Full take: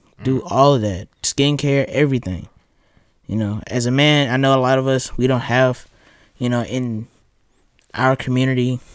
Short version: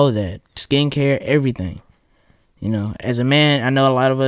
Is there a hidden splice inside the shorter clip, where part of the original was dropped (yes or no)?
no